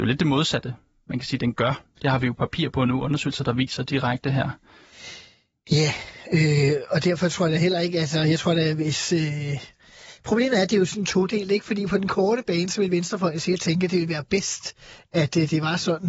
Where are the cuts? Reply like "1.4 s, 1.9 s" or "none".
none